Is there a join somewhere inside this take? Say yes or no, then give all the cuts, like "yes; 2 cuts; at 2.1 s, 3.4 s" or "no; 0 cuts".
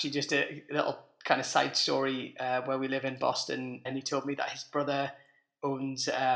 yes; 1 cut; at 3.8 s